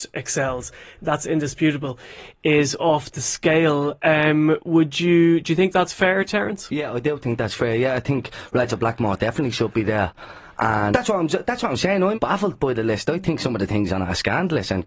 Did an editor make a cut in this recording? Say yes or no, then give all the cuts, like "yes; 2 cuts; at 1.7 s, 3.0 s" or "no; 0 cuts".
yes; 2 cuts; at 10.9 s, 12.1 s